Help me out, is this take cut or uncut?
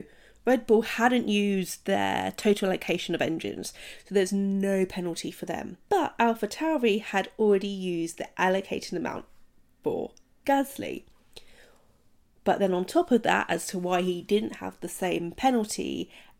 cut